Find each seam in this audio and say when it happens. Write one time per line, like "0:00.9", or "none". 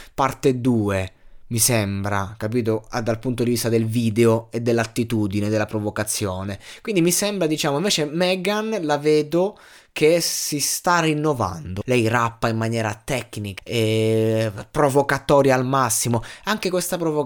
0:11.8
0:13.6